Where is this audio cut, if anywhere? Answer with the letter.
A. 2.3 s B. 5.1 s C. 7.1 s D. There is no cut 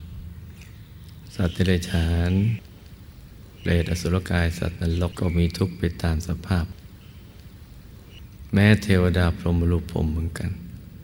B